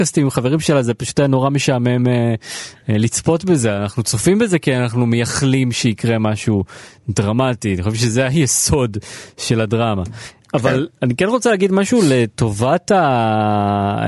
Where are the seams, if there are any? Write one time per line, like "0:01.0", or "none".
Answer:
none